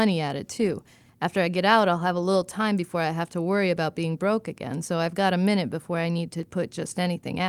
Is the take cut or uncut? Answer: uncut